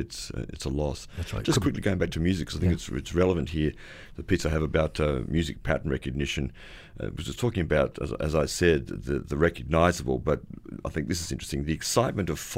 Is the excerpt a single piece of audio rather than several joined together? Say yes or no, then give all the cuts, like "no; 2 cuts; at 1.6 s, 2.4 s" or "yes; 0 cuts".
yes; 0 cuts